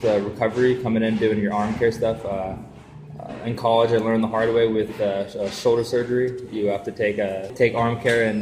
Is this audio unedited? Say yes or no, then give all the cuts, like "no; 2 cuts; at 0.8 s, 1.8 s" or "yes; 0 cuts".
yes; 0 cuts